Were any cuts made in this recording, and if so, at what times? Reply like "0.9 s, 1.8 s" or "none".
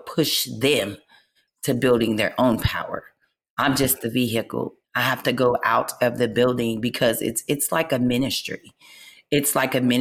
4.8 s